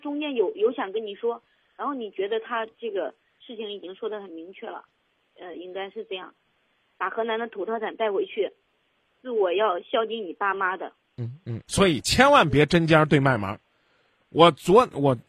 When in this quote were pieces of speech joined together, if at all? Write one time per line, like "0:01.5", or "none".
0:06.9
0:11.6

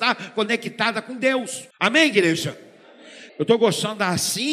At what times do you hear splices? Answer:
0:01.7
0:03.3

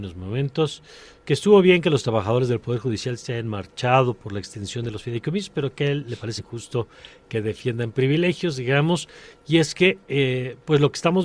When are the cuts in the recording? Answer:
0:06.4

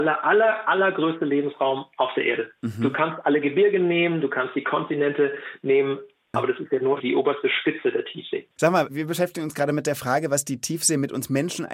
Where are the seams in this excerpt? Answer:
0:06.3

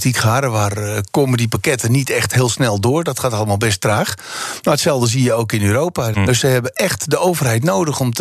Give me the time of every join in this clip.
0:06.1

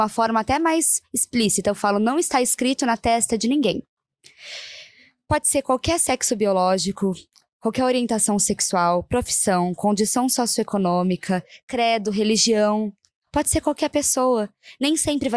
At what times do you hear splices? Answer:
none

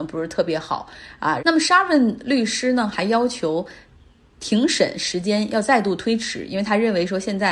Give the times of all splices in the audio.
0:01.4

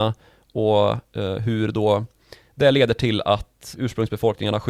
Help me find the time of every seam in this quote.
0:03.7

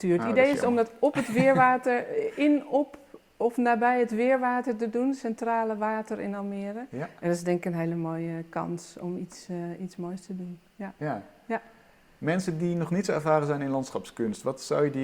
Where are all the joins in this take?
none

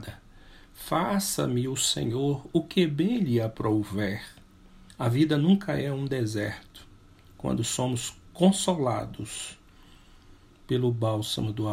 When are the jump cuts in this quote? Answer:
0:04.9

